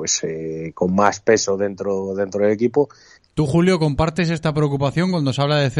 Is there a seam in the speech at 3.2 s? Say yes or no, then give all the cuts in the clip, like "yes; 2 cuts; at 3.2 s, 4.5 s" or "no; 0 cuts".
yes; 1 cut; at 3.2 s